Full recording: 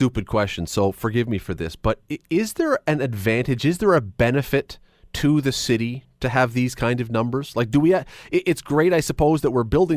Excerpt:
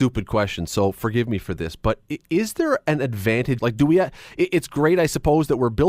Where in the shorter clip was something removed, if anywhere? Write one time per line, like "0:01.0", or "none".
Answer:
0:03.6